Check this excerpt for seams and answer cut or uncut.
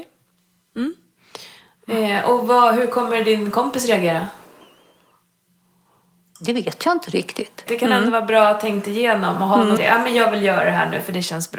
cut